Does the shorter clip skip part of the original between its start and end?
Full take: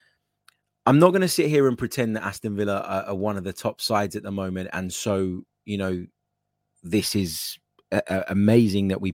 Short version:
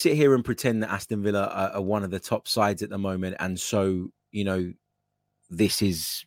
no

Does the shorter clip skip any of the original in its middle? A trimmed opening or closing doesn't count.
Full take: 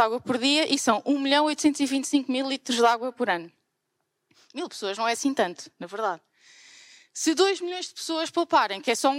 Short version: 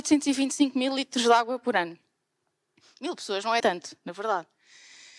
yes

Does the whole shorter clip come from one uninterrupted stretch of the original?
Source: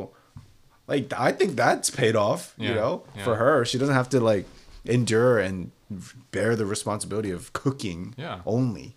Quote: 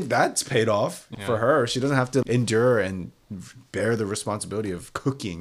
no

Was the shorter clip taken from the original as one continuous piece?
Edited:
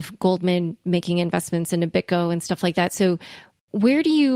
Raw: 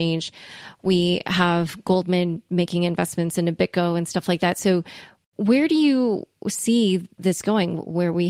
yes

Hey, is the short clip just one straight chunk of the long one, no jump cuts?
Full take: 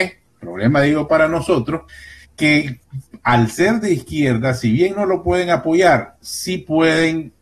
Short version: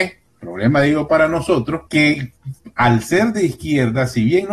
no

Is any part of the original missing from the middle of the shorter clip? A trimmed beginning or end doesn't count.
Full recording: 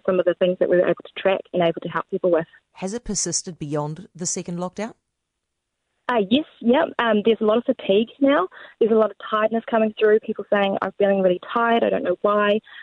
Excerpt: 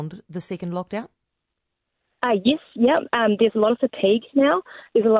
no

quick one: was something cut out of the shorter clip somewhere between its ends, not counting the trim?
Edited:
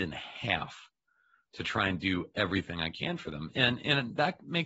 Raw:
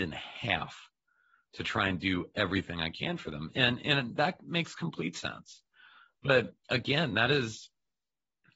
no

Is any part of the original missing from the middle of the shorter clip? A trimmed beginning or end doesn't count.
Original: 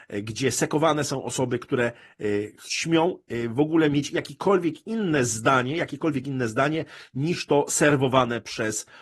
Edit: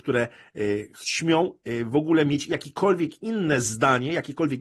no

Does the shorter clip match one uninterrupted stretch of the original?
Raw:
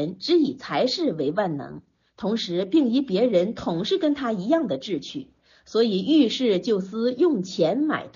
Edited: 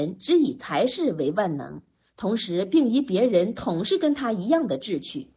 yes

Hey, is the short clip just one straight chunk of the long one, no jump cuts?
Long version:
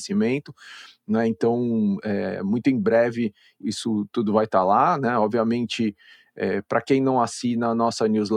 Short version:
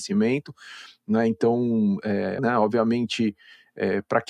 no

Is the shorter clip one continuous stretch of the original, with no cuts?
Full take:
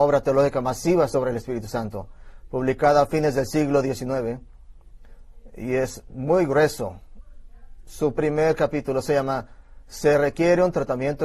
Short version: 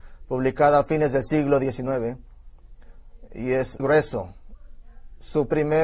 no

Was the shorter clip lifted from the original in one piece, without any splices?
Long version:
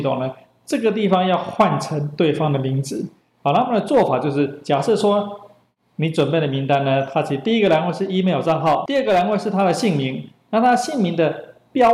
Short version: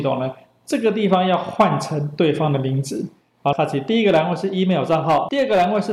no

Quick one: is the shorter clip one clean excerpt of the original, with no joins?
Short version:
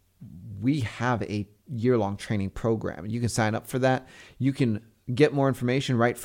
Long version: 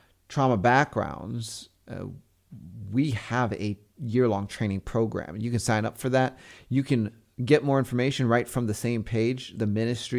yes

